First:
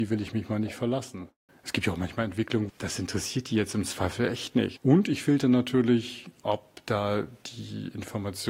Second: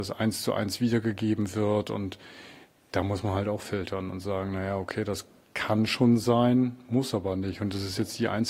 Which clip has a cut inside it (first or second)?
first